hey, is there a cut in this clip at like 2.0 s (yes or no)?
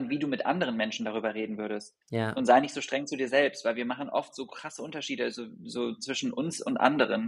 yes